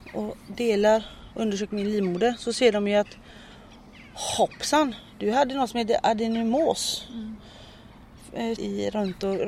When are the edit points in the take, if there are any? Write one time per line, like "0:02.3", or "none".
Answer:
0:08.6